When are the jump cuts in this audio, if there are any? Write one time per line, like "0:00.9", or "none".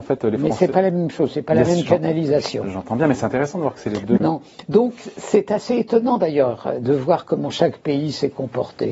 0:04.2